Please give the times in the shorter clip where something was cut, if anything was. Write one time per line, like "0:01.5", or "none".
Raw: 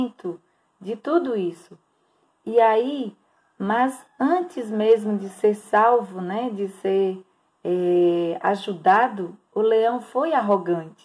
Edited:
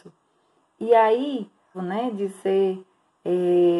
0:01.7